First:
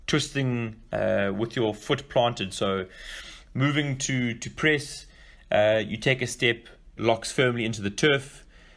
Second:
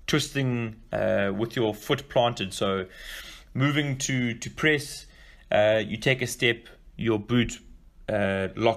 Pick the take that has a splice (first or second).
first